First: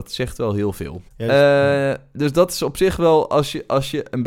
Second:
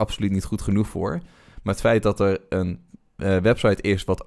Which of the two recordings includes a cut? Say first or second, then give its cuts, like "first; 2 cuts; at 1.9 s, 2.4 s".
first; 1 cut; at 1.1 s